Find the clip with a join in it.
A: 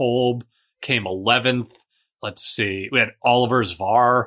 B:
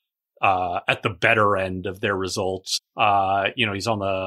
B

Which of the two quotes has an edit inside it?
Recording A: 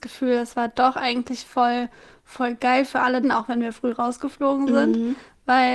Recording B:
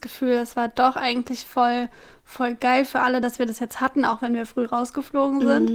A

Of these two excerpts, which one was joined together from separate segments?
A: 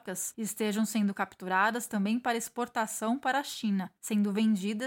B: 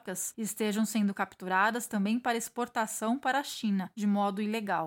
B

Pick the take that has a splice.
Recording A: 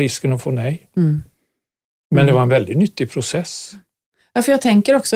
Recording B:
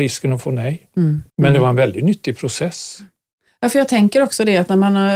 B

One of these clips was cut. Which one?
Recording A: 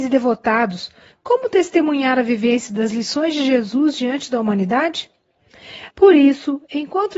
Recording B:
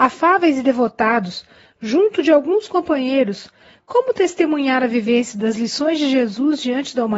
A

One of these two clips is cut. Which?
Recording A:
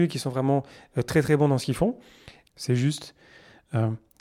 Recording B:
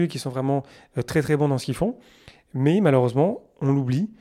A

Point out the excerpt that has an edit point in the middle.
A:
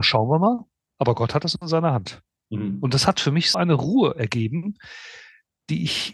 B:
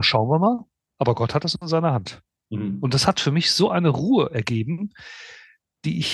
A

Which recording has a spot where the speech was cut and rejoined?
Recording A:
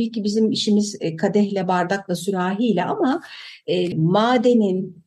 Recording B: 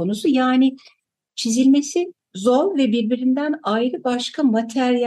A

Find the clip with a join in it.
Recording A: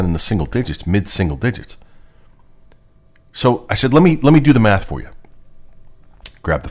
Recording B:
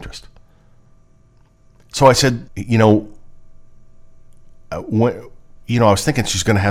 B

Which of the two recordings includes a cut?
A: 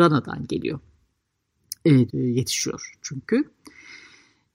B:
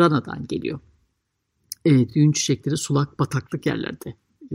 A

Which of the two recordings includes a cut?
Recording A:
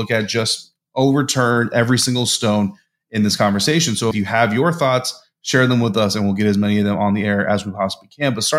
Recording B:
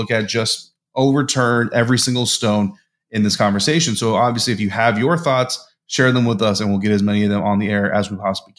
A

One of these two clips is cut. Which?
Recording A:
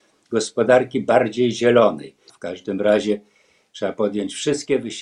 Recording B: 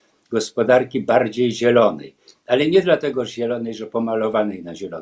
A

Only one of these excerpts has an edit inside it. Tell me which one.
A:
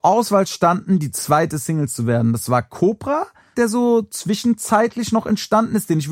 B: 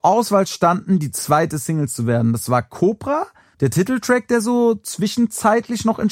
A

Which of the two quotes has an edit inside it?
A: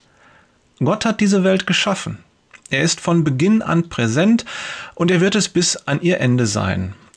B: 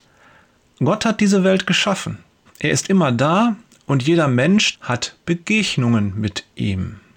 B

